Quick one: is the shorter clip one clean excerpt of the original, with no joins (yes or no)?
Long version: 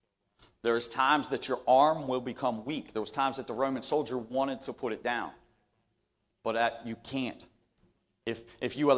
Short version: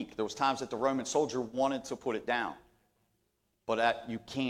yes